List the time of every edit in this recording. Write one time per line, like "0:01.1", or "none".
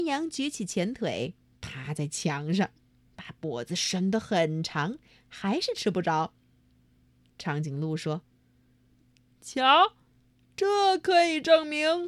none